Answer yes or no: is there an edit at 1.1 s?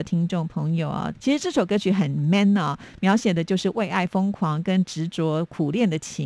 yes